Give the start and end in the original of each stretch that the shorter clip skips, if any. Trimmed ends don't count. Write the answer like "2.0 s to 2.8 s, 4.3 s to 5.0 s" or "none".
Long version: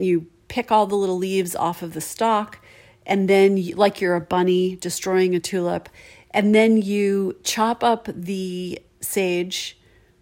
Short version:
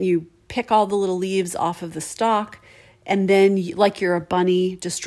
none